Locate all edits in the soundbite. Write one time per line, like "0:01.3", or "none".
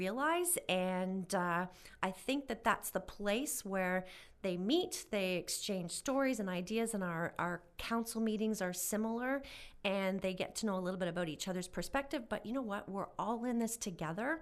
none